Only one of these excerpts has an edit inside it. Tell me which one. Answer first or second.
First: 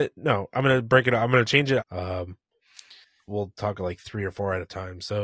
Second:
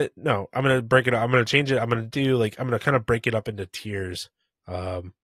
first